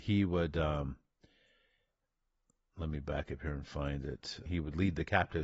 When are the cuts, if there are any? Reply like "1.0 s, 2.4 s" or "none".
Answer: 4.5 s